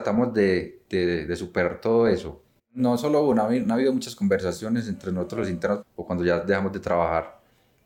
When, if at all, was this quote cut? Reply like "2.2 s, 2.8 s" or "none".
2.6 s, 5.8 s